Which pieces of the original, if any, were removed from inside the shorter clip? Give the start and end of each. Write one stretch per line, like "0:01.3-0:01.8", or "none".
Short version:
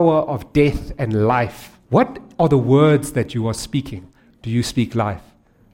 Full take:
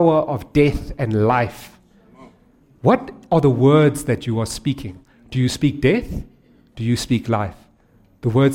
0:01.8-0:02.8
0:05.2-0:06.6

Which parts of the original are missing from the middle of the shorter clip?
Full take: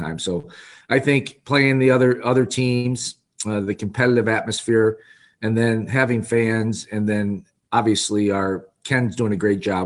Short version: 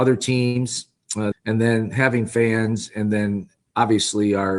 0:03.6-0:05.3

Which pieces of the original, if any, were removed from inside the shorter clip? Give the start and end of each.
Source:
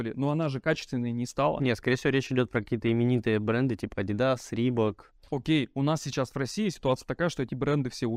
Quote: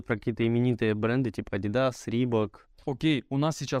none

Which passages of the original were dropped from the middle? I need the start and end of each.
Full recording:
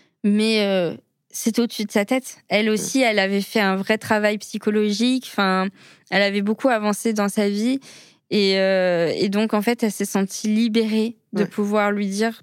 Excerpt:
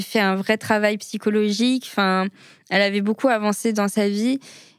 none

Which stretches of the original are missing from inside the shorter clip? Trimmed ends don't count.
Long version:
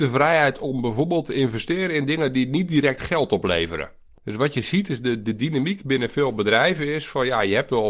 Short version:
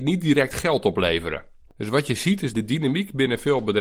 0:05.0-0:05.2

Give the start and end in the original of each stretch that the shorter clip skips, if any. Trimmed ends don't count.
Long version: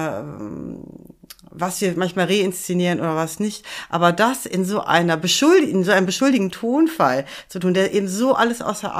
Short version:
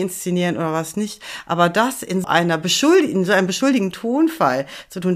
0:04.7-0:04.8

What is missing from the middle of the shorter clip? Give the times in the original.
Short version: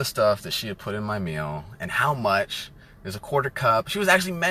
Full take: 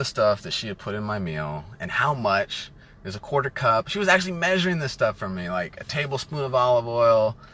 none

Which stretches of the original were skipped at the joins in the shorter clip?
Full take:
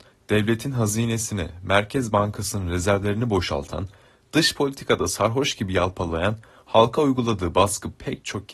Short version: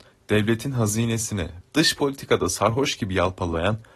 0:01.6-0:04.2

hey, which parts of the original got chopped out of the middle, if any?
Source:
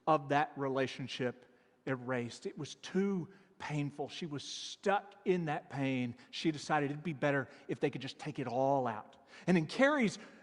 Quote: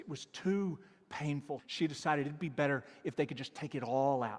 0:04.1-0:06.2

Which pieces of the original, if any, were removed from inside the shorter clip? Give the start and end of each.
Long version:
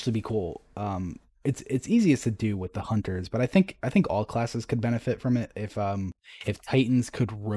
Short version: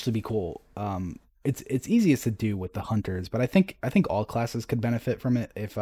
none

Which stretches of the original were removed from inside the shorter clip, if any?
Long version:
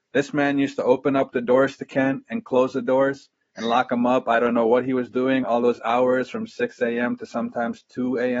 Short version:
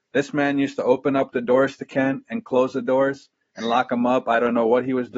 none

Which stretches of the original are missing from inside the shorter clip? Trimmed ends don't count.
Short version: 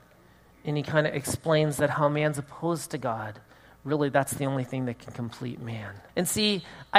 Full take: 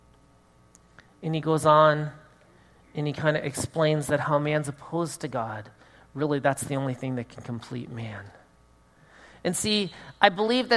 0:08.4-0:09.4

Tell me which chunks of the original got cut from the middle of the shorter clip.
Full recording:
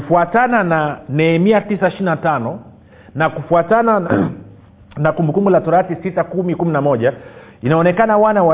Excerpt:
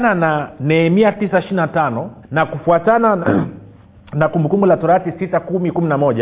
0:02.7-0:03.1

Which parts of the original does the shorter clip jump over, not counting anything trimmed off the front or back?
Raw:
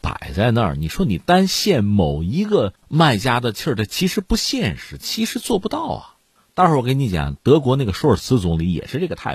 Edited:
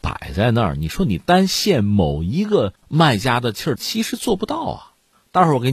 0:03.8-0:05.0

